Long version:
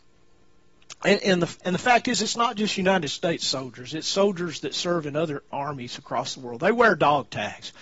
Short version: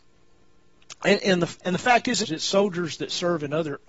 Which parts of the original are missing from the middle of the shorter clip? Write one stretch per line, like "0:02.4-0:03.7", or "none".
0:02.2-0:03.9